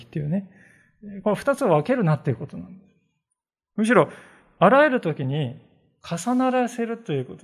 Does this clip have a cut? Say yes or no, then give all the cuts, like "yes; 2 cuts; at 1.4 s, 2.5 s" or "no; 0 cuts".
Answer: no; 0 cuts